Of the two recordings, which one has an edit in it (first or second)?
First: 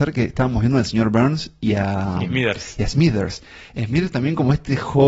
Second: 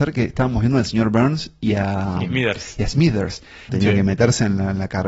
second